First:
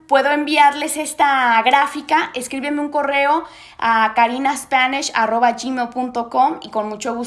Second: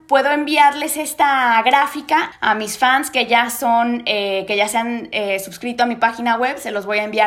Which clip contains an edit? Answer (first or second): second